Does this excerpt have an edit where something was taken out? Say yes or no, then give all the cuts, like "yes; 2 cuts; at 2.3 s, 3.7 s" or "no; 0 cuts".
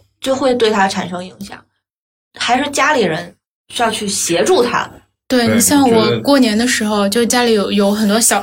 no; 0 cuts